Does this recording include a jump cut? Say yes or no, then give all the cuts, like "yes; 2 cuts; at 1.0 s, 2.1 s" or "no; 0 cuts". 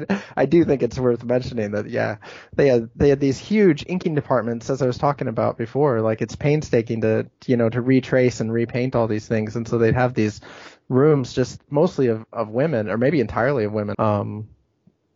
yes; 1 cut; at 13.9 s